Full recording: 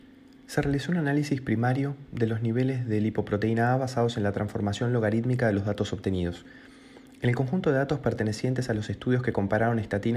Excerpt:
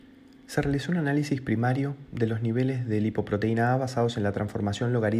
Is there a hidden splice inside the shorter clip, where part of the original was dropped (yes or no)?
no